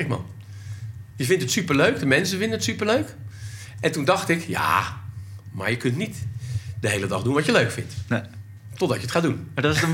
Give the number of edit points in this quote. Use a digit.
0